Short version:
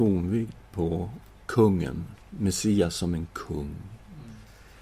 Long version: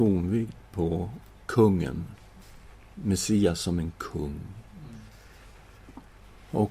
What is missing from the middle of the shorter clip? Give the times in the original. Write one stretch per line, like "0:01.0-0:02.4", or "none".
0:02.2-0:02.9

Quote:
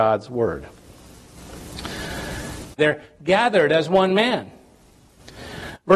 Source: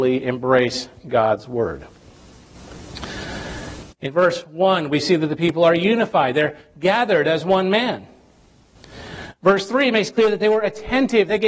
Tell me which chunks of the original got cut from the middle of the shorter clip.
0:04.0-0:06.3

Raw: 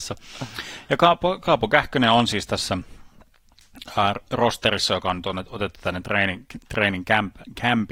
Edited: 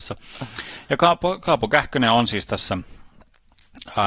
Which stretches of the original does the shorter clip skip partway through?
none

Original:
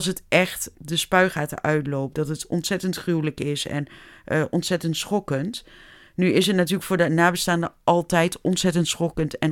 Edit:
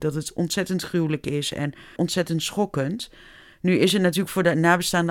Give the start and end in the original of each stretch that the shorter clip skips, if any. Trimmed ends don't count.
0:04.1-0:04.5

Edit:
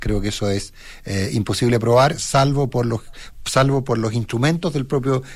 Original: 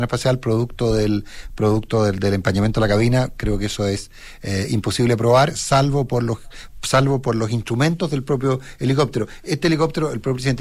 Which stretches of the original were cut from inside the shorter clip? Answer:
none

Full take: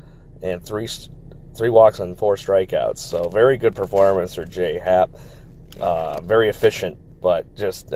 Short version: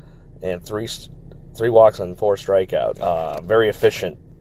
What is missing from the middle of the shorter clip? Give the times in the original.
0:02.9-0:05.7

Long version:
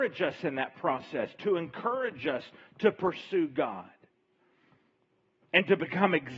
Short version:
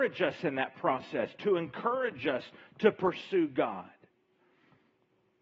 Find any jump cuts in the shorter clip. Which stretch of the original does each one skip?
none

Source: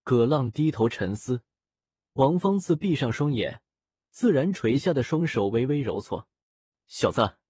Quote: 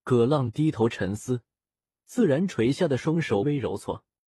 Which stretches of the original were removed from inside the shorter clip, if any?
0:01.9-0:04.0
0:05.5-0:05.7

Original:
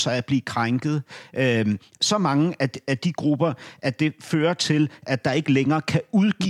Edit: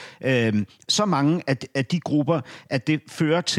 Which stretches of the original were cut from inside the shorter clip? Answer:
none

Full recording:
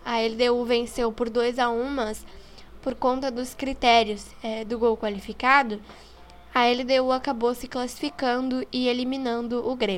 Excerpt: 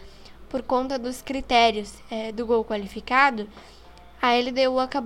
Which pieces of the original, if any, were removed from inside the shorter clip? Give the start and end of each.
none

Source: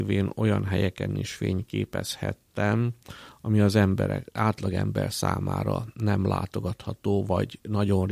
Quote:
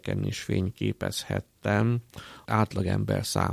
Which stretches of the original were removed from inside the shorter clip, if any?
0:03.4-0:04.3

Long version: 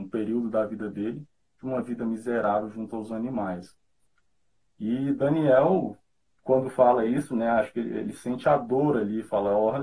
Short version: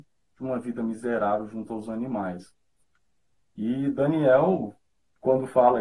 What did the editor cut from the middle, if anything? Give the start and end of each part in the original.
none

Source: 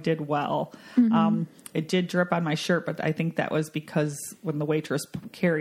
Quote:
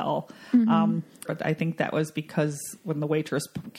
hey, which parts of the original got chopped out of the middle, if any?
0:01.7-0:02.8

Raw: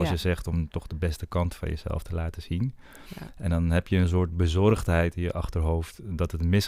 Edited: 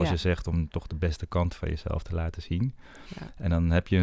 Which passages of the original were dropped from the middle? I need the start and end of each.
none

